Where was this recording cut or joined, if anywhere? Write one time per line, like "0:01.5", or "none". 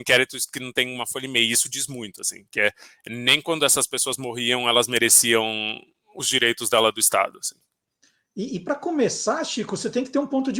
none